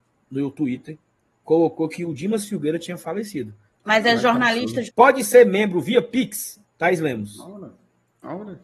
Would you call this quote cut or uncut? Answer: cut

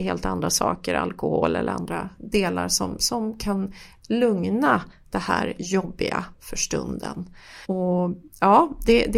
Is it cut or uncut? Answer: cut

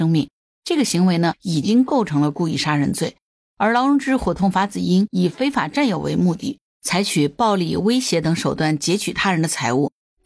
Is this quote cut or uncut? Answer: uncut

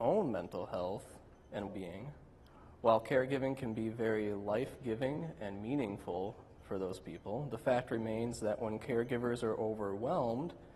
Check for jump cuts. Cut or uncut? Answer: cut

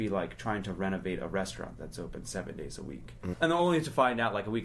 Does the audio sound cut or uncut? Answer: cut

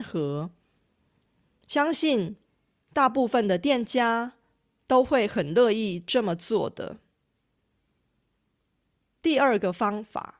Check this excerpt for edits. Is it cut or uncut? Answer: uncut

